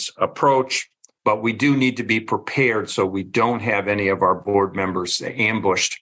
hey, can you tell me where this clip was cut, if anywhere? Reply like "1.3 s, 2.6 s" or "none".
1.2 s